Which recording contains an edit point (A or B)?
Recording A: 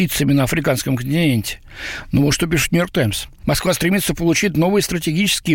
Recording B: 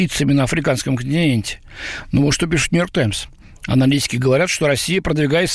A